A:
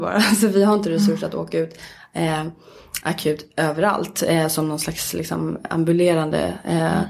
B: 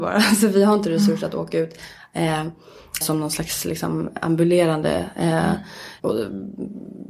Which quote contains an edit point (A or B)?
B